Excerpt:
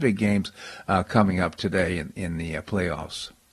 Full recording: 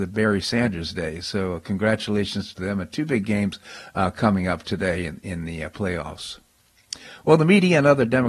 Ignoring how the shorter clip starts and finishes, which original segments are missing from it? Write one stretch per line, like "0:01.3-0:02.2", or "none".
none